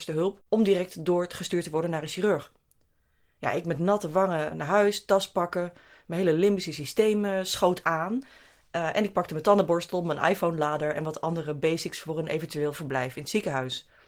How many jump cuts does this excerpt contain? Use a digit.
1